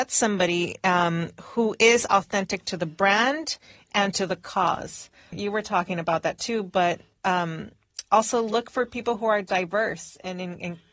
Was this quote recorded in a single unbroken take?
no; 1 cut; at 5.3 s

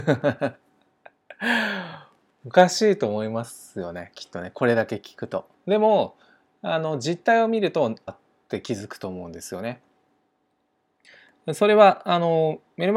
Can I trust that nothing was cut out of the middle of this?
no; 1 cut; at 8.1 s

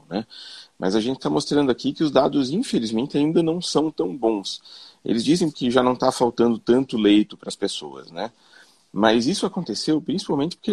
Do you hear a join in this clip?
yes; 1 cut; at 5.5 s

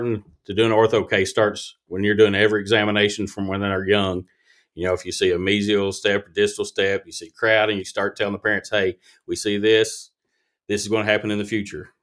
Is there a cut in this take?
yes; 1 cut; at 7.8 s

